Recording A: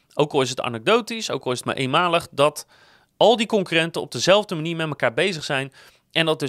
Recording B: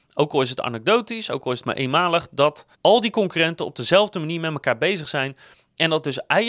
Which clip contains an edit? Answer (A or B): B